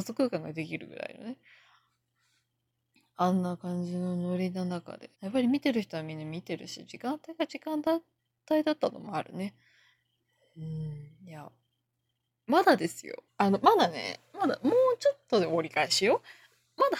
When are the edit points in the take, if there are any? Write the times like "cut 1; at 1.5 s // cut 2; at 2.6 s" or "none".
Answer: cut 1; at 5.1 s // cut 2; at 13.3 s